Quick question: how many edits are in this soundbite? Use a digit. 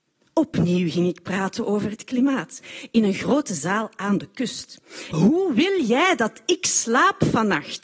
1